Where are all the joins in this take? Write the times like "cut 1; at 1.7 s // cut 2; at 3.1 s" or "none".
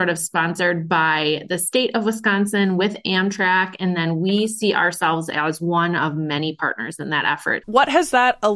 cut 1; at 7.6 s

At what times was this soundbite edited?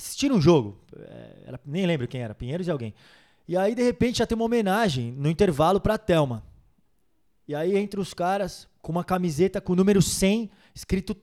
none

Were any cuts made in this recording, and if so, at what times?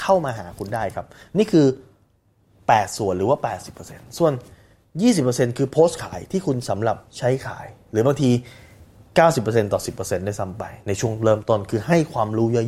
cut 1; at 7.1 s

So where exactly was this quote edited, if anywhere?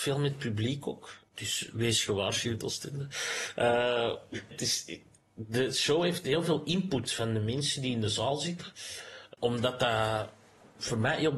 cut 1; at 4.5 s

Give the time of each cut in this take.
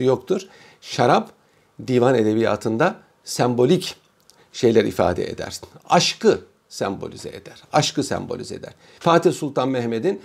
cut 1; at 9.0 s

